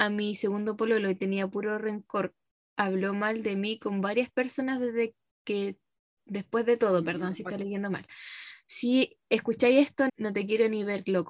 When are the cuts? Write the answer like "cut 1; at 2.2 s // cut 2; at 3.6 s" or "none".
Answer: cut 1; at 10.1 s